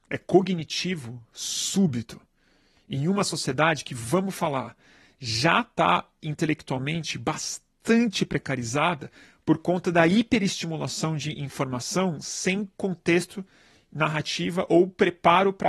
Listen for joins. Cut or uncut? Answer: uncut